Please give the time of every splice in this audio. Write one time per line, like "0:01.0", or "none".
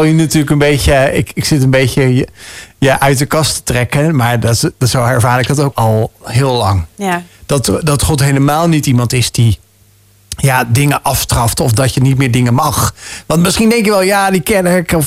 0:05.7

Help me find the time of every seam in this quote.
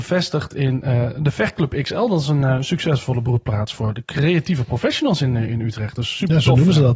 none

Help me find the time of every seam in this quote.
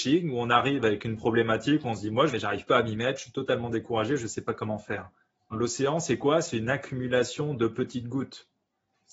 0:02.3
0:05.5

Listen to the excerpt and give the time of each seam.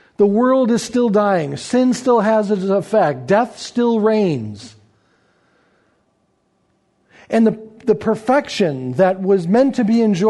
none

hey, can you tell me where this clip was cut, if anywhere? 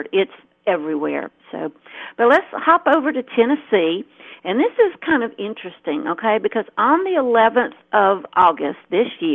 none

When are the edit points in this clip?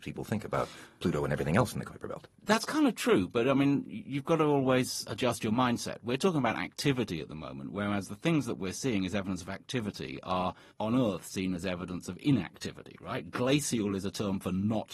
0:10.7

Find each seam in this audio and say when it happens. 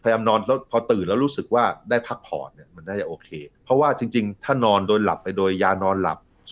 0:03.5

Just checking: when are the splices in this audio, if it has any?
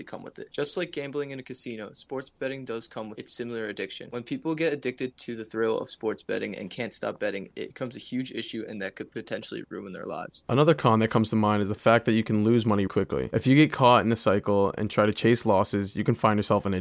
0:12.9

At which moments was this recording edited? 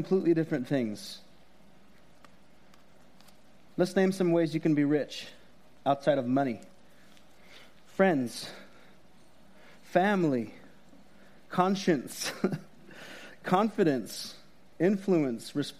none

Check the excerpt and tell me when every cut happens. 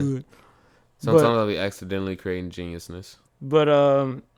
0:03.3

